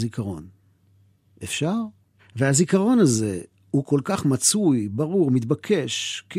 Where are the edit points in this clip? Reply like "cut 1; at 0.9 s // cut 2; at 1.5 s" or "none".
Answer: cut 1; at 2.2 s